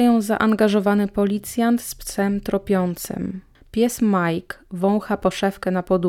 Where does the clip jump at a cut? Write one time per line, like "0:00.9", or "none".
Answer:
none